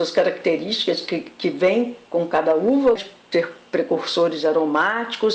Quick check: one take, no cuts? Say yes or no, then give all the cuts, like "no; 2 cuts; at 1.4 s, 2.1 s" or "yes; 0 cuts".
no; 1 cut; at 3.0 s